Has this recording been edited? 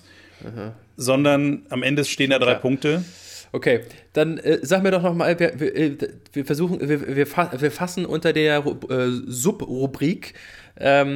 no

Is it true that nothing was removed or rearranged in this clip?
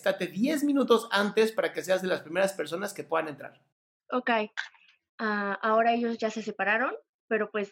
no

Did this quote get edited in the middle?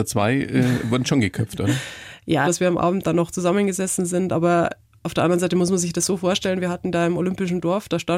yes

